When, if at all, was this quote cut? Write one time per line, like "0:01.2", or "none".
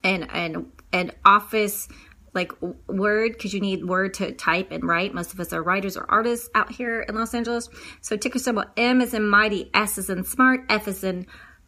none

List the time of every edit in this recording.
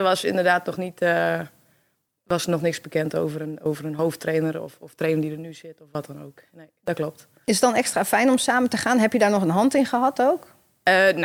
none

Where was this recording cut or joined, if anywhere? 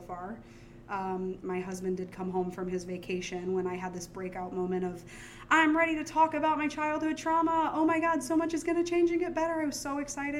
0:01.4

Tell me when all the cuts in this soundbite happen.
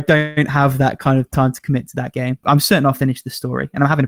0:02.4

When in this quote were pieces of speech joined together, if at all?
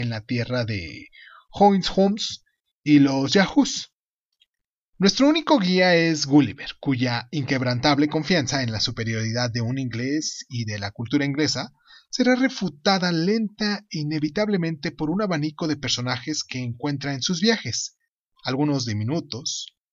0:04.9

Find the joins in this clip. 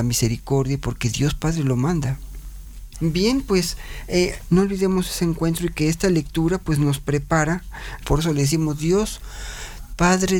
0:02.9
0:04.5
0:08.0

